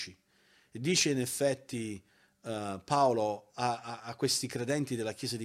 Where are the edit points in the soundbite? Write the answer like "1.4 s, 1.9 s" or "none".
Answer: none